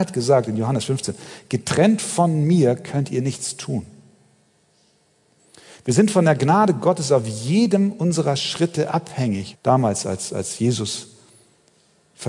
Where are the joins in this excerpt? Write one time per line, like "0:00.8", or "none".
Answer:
0:09.5